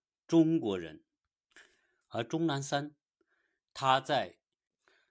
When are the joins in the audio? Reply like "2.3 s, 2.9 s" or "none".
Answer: 2.0 s